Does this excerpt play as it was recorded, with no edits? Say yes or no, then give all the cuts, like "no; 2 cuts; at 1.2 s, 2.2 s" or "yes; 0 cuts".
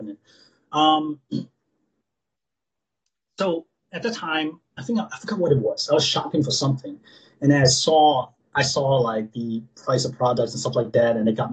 yes; 0 cuts